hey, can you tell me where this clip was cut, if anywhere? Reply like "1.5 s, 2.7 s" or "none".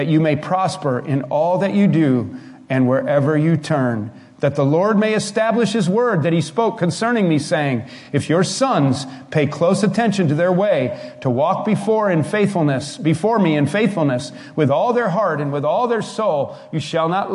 none